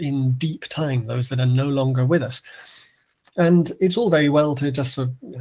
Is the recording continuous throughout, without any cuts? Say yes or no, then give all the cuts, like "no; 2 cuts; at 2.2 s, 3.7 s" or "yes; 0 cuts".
yes; 0 cuts